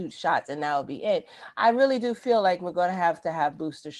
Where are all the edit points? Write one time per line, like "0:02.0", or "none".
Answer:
none

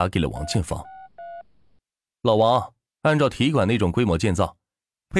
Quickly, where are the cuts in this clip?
0:02.9

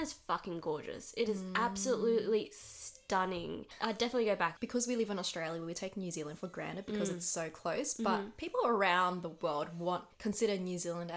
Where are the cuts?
0:10.1

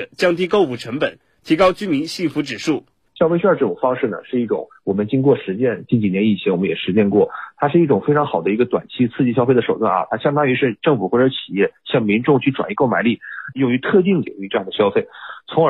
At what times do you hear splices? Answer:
0:03.1
0:13.5

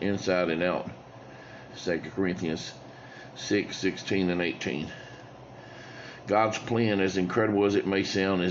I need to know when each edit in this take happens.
0:01.7

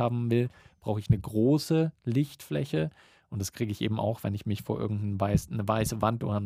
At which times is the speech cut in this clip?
none

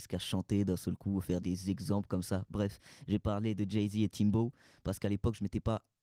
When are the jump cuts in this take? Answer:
0:01.4

